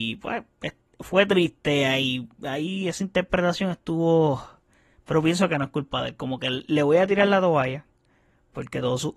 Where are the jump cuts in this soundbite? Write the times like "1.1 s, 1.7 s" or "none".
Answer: none